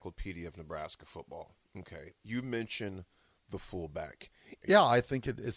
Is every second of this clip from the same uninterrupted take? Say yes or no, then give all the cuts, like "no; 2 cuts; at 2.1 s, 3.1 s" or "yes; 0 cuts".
no; 1 cut; at 4.6 s